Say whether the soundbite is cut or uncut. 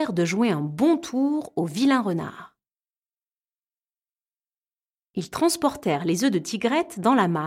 uncut